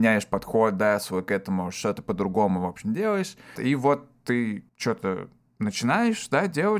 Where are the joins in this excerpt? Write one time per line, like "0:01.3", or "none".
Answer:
0:03.6
0:04.7

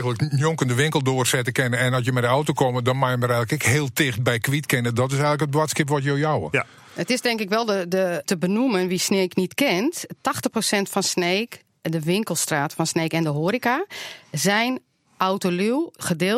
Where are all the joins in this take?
0:08.2

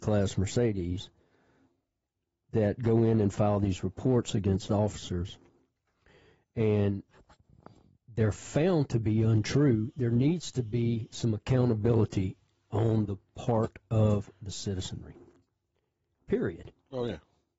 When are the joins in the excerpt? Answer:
none

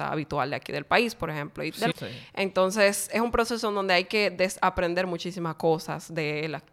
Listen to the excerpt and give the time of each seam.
0:01.9

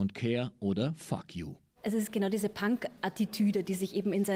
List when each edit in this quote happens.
0:01.8

